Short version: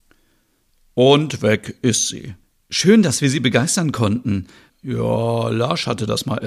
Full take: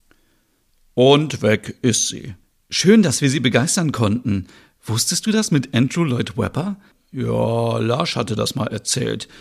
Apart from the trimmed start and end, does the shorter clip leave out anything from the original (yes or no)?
yes